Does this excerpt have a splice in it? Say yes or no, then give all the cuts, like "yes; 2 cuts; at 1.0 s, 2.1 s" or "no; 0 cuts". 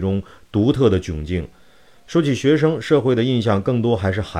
no; 0 cuts